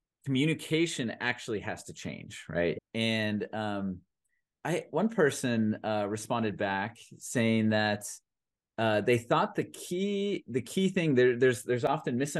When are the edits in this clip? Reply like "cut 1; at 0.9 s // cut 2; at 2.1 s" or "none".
cut 1; at 2.8 s // cut 2; at 4.9 s